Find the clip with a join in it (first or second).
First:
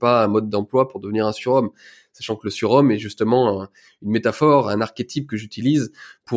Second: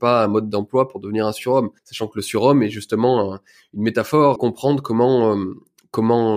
second